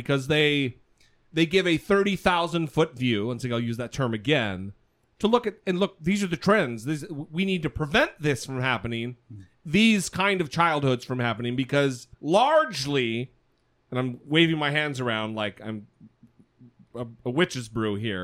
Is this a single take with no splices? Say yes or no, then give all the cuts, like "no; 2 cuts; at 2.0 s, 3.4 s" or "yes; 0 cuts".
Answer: no; 1 cut; at 12.1 s